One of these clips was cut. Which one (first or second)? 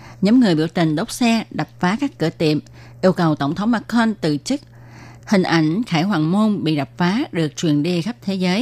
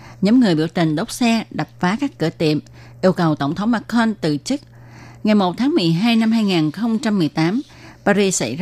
first